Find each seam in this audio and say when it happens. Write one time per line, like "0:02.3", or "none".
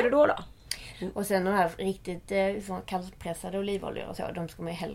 0:00.9